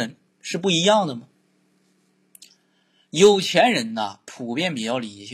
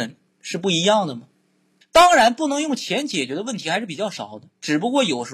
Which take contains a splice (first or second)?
second